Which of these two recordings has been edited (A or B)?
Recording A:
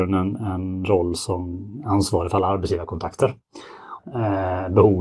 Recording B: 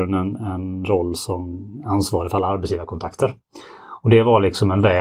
A